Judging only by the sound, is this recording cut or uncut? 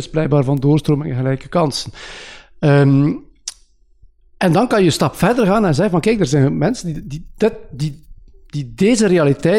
uncut